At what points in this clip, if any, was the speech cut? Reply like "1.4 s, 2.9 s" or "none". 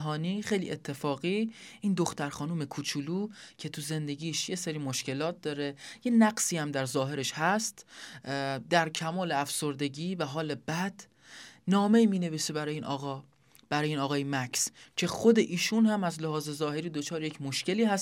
none